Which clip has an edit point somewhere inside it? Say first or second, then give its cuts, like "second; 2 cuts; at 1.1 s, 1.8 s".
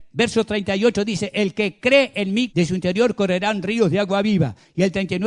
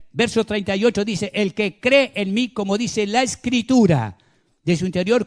first; 1 cut; at 2.5 s